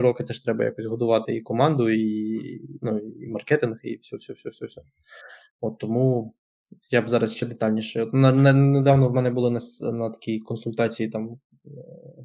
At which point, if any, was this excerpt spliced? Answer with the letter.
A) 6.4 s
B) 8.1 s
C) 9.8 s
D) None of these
D